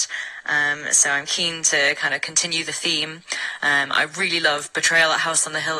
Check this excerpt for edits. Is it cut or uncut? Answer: uncut